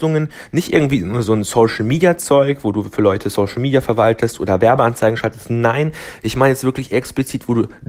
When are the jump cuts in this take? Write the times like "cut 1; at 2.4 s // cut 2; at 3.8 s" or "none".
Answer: none